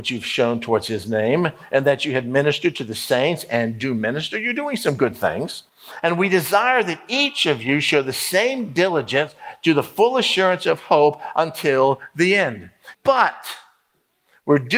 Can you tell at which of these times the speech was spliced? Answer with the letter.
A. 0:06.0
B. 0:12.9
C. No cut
B